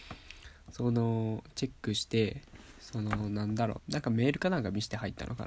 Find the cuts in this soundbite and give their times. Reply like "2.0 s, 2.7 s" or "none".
3.8 s